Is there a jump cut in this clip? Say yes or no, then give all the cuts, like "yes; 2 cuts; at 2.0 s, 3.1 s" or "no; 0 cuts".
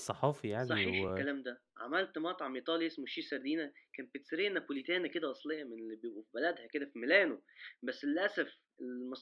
no; 0 cuts